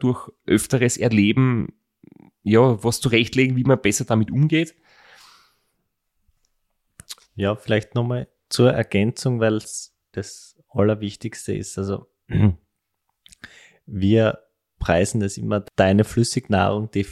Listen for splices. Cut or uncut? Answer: cut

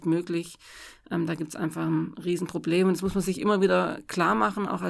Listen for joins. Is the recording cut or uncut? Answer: uncut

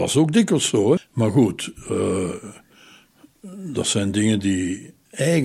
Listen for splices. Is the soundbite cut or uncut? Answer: cut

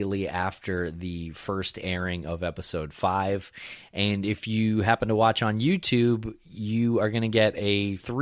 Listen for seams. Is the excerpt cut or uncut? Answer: uncut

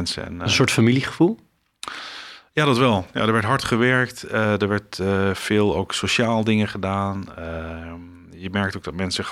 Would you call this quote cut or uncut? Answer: uncut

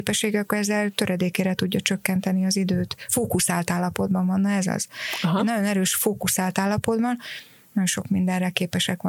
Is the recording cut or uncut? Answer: uncut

